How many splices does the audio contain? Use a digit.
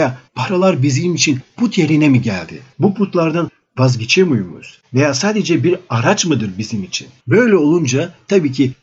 2